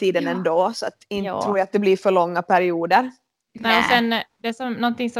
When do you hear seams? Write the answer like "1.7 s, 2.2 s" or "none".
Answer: none